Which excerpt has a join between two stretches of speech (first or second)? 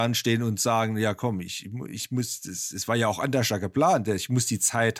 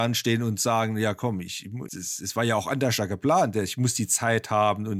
second